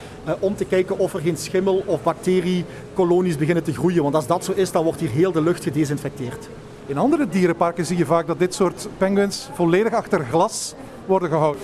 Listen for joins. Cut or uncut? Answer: uncut